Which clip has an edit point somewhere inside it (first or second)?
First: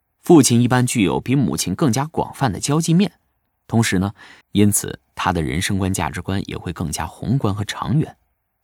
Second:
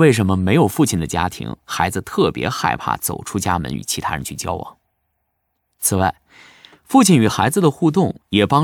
first